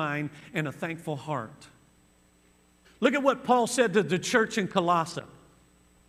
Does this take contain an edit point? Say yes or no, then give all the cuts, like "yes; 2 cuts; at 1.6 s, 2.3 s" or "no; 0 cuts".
yes; 1 cut; at 2.8 s